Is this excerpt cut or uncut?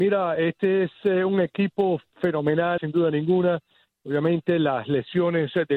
cut